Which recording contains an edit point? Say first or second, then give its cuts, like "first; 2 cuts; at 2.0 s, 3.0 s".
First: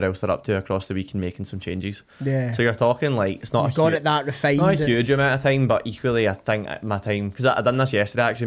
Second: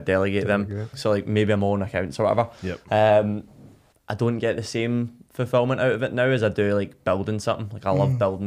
second; 2 cuts; at 0.9 s, 3.9 s